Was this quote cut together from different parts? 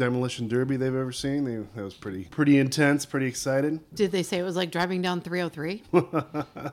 no; 0 cuts

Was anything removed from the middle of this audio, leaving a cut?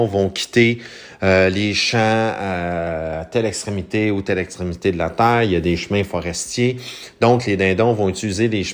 no; 0 cuts

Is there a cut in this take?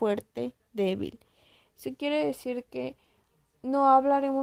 no; 0 cuts

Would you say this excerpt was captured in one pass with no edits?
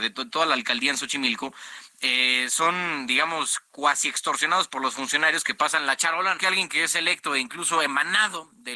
no; 1 cut; at 6.4 s

